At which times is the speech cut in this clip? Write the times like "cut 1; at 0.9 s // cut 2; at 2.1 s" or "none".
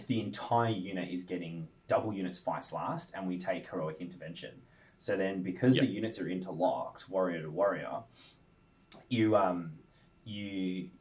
none